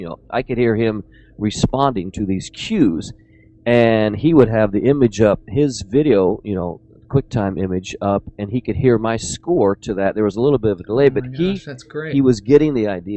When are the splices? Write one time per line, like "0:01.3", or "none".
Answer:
none